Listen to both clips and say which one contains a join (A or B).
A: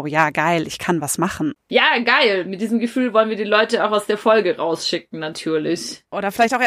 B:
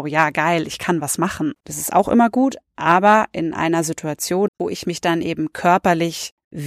B